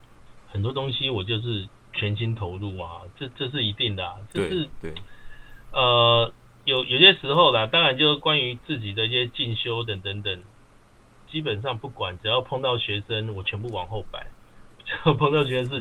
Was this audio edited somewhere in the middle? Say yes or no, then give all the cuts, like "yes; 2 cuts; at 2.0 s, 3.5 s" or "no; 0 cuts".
yes; 1 cut; at 9.9 s